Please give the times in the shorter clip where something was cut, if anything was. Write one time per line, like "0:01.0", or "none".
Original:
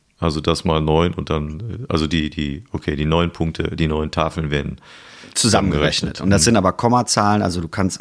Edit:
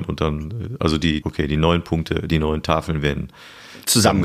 0:01.2